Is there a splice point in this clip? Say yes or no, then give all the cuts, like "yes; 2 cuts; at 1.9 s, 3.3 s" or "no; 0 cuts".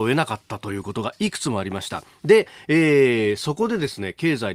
no; 0 cuts